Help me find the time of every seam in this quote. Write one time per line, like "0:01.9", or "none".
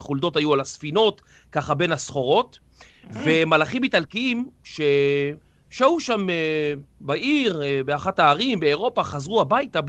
none